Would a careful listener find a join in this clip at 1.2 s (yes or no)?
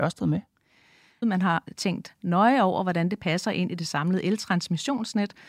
yes